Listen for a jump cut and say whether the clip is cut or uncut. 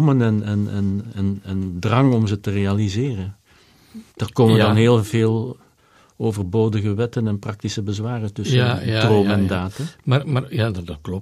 cut